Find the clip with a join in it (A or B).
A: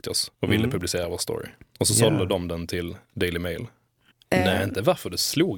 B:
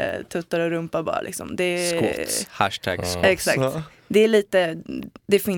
A